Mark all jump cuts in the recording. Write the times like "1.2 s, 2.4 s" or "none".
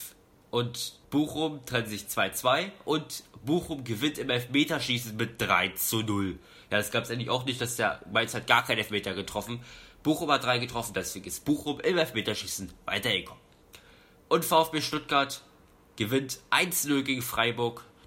1.0 s